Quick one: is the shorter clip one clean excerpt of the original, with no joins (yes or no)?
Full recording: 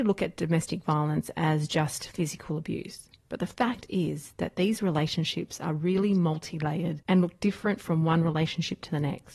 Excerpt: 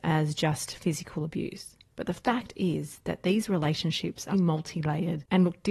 no